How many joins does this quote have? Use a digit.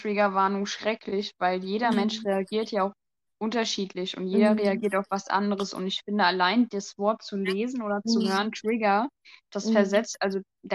0